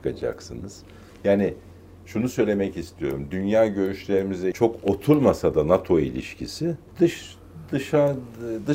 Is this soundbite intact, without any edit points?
no; 2 cuts; at 4.5 s, 6.9 s

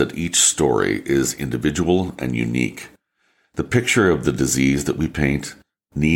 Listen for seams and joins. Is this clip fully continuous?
yes; 0 cuts

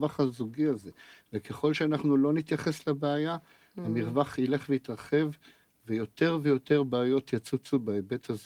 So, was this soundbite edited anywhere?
no; 0 cuts

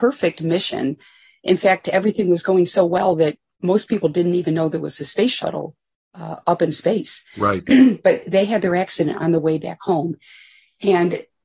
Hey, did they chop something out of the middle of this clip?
no; 0 cuts

